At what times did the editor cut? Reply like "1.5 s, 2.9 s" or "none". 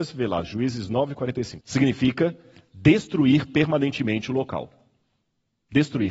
1.6 s